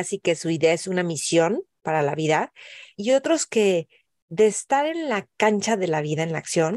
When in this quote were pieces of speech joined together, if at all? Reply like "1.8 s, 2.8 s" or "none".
2.9 s